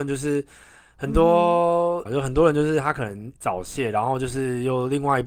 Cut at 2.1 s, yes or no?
yes